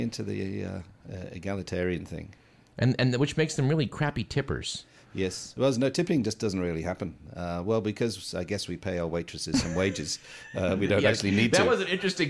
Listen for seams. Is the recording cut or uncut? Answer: uncut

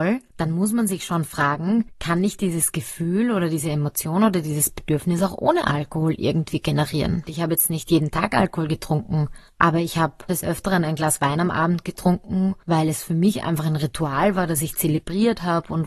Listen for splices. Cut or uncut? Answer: cut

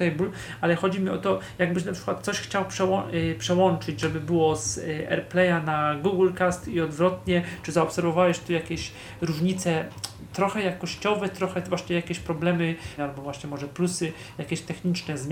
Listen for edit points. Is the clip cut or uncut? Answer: cut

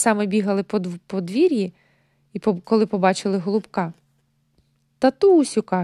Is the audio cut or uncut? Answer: uncut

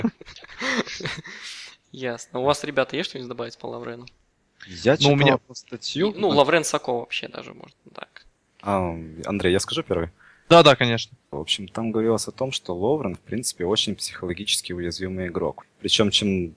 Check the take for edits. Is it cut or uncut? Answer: cut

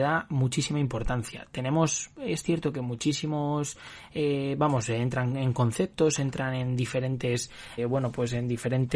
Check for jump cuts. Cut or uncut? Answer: cut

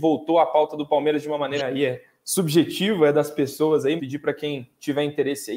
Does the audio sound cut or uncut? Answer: cut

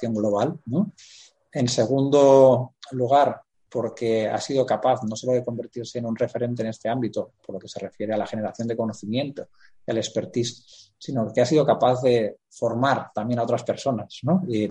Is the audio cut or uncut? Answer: uncut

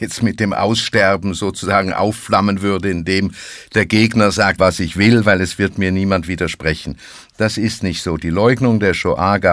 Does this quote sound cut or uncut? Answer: cut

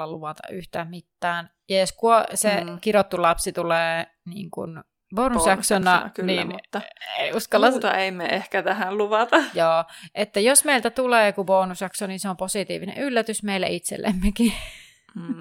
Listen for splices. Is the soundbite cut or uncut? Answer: uncut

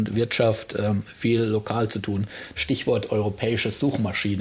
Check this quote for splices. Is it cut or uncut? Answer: cut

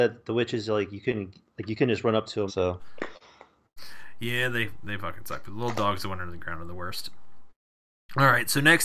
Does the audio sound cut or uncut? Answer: cut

